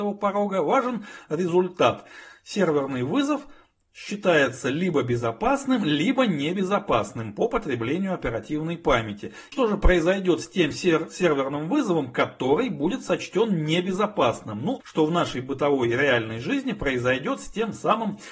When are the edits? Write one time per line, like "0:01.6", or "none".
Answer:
0:09.5
0:14.8